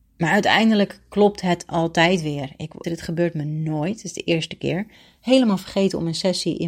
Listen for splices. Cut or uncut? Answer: cut